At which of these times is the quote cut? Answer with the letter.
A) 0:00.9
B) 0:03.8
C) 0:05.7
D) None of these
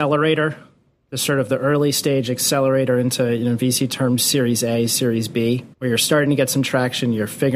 C